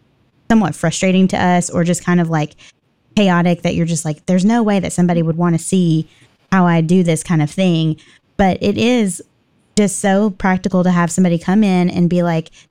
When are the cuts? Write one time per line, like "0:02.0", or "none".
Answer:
none